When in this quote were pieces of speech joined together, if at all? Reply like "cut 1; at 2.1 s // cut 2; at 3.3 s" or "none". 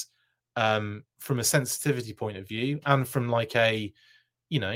none